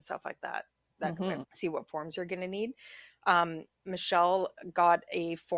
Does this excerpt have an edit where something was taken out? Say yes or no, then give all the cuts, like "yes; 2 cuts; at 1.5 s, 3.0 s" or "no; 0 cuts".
yes; 1 cut; at 1.4 s